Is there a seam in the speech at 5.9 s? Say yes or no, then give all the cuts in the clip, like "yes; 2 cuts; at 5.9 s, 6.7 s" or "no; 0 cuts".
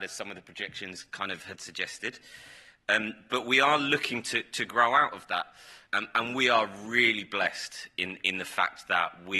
yes; 1 cut; at 5.9 s